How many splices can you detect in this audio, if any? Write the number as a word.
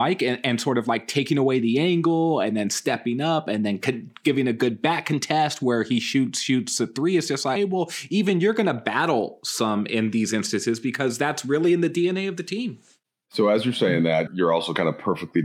two